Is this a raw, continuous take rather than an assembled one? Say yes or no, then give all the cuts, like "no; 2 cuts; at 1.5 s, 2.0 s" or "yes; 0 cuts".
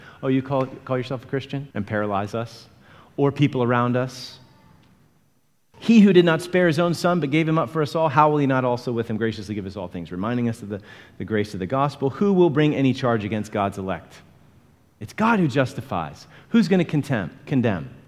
no; 2 cuts; at 1.7 s, 5.7 s